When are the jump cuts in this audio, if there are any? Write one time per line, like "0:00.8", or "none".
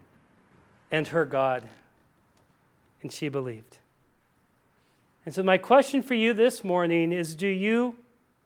none